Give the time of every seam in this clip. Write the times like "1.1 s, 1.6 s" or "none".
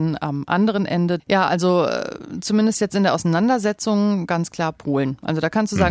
1.2 s